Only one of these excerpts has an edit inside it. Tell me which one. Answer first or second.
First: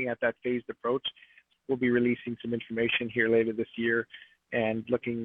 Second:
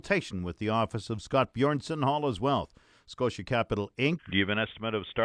second